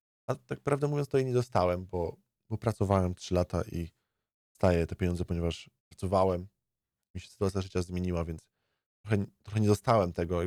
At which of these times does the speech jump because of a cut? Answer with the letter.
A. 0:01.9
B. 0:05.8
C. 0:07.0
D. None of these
B